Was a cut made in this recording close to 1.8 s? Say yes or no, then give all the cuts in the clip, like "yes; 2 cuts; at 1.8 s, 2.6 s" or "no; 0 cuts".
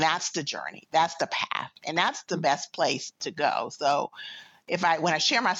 no; 0 cuts